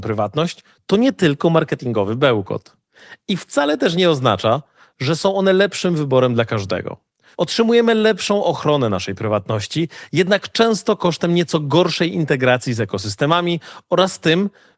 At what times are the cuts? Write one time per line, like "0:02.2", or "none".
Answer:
0:07.3